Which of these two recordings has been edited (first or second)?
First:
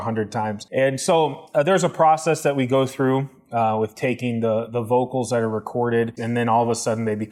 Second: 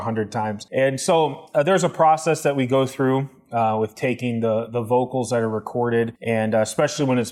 first